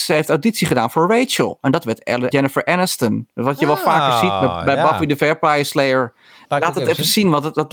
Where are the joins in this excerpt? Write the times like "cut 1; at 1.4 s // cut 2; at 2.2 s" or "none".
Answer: cut 1; at 2.3 s // cut 2; at 6.4 s